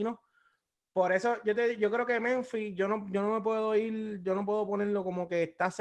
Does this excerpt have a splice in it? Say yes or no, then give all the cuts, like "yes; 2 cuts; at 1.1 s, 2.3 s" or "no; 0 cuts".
no; 0 cuts